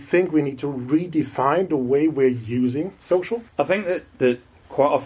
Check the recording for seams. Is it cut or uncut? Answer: cut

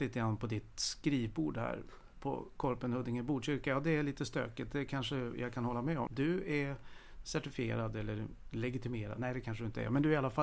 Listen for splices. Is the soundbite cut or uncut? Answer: cut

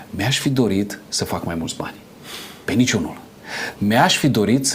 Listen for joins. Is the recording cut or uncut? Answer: cut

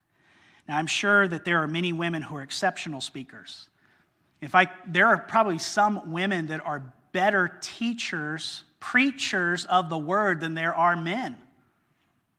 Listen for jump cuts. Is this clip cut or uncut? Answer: uncut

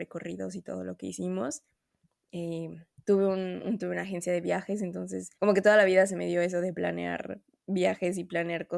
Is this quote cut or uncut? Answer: cut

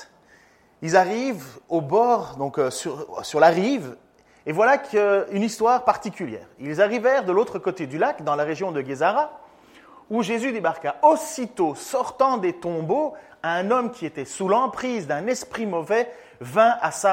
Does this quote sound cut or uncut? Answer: uncut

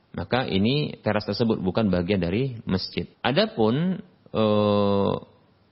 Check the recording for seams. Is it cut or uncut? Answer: cut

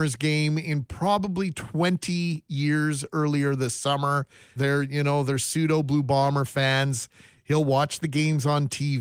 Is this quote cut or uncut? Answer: cut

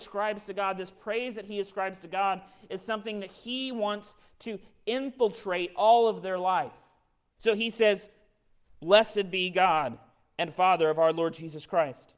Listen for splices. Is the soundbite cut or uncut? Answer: cut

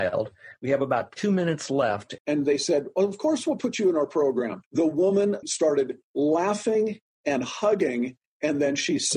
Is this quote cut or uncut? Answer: cut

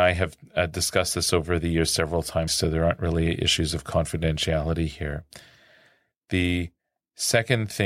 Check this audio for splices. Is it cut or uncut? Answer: cut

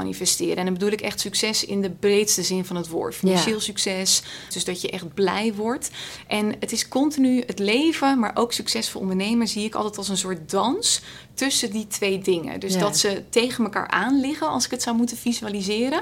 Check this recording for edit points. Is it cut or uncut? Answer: cut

